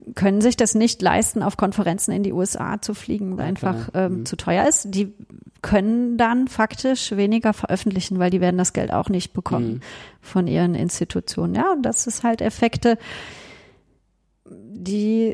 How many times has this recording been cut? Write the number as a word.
one